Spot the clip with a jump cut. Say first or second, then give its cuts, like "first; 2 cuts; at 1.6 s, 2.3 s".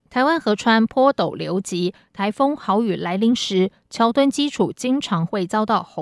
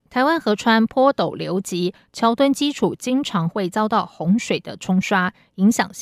second; 1 cut; at 2.1 s